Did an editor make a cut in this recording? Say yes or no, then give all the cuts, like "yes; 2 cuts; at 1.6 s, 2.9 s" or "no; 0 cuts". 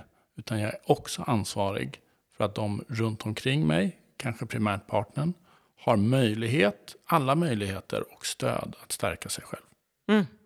no; 0 cuts